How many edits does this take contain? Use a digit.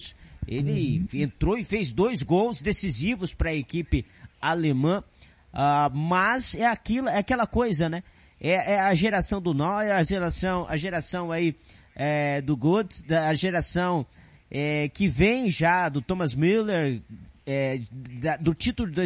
0